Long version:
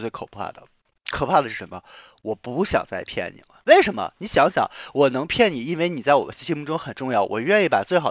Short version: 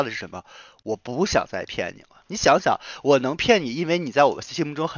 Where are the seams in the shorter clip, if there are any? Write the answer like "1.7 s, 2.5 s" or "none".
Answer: 2.2 s